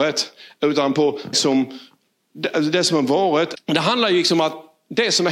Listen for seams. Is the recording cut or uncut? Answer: cut